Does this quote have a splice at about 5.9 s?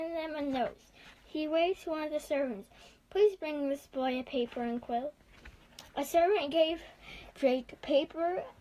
no; 0 cuts

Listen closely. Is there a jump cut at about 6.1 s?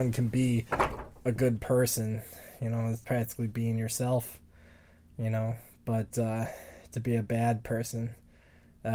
no; 1 cut; at 3.0 s

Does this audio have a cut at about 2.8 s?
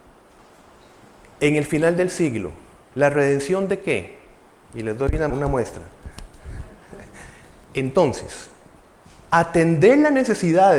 no; 1 cut; at 5.3 s

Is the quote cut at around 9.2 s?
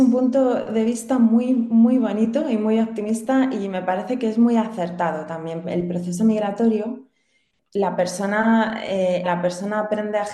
yes; 2 cuts; at 5.6 s, 9.2 s

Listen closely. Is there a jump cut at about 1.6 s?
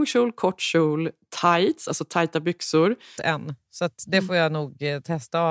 no; 1 cut; at 3.2 s

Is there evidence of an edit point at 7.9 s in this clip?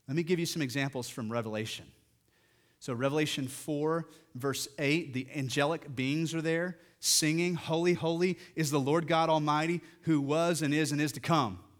yes; 1 cut; at 7.9 s

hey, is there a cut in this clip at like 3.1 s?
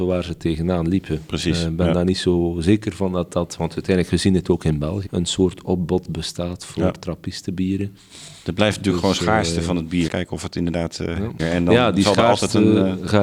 no; 3 cuts; at 5.1 s, 10.1 s, 11.4 s

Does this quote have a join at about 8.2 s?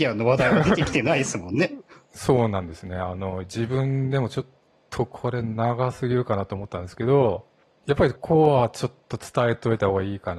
yes; 1 cut; at 8.2 s

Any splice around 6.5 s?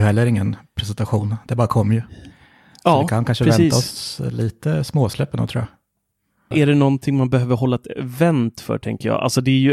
yes; 1 cut; at 6.5 s

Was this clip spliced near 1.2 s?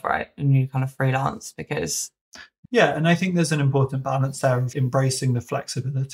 no; 2 cuts; at 2.7 s, 4.7 s

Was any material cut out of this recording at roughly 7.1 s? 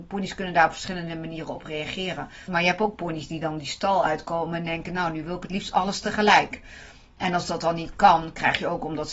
no; 1 cut; at 2.5 s

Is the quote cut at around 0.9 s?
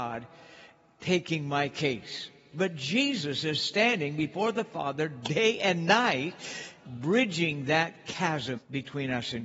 no; 3 cuts; at 2.5 s, 6.8 s, 8.6 s

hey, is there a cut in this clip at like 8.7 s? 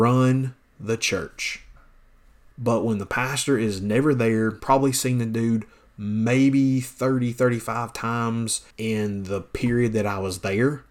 yes; 3 cuts; at 2.5 s, 4.6 s, 8.7 s

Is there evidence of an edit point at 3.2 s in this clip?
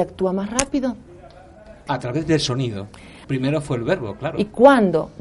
yes; 2 cuts; at 1.9 s, 3.2 s

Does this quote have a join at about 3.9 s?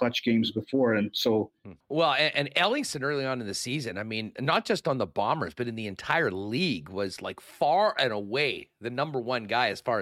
no; 1 cut; at 1.8 s

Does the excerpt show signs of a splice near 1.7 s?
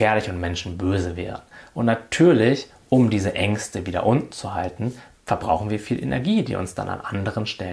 no; 0 cuts

